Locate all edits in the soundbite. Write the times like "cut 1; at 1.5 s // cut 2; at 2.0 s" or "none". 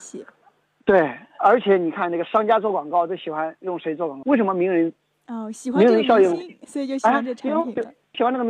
cut 1; at 4.2 s